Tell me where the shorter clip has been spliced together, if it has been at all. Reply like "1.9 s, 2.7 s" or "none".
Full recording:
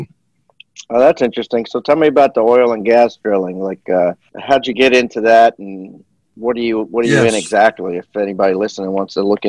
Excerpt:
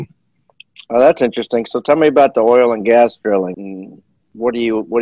3.5 s

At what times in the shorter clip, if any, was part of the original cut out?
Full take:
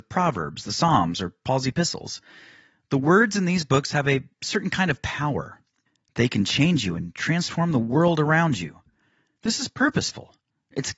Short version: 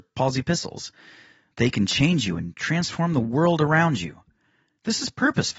1.5 s

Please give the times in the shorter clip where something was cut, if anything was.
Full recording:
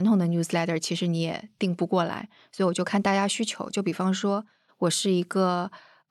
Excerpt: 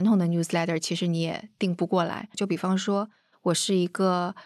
2.3 s

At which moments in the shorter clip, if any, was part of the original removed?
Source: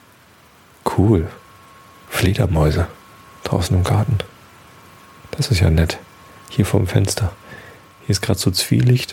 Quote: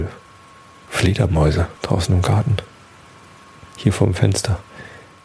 1.8 s, 3.7 s

